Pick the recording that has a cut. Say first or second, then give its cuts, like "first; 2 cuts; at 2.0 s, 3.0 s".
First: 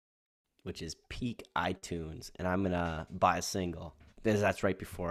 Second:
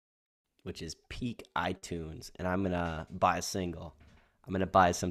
first; 1 cut; at 4.1 s